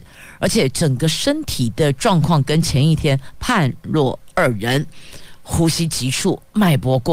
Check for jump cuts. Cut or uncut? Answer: uncut